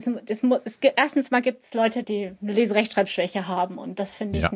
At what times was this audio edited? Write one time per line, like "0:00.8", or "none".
0:02.0